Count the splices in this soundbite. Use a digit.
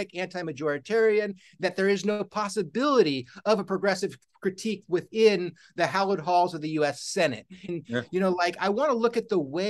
1